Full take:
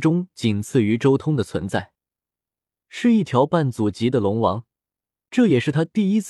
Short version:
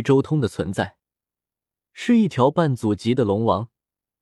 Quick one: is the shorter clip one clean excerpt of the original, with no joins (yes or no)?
yes